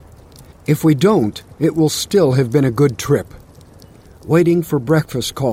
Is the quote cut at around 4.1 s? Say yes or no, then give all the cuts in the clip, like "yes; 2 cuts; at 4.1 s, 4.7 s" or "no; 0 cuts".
yes; 1 cut; at 4.1 s